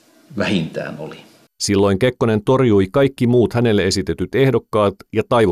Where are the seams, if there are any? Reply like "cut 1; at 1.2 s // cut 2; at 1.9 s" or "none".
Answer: cut 1; at 1.5 s